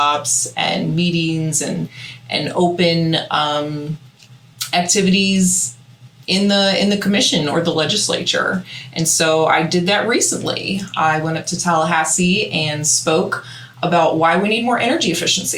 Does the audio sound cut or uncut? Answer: uncut